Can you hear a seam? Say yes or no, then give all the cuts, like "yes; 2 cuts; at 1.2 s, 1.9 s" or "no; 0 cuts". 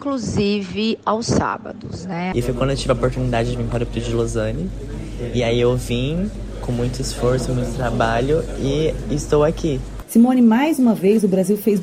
yes; 2 cuts; at 2.3 s, 10.0 s